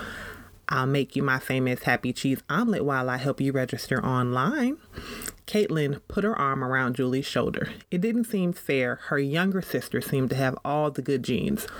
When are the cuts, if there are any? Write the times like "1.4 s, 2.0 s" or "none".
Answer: none